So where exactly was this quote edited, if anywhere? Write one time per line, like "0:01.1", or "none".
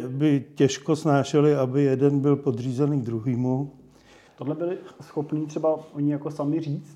0:04.3